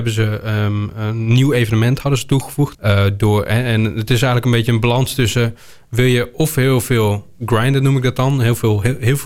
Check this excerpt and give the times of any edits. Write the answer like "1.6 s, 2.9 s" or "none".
2.7 s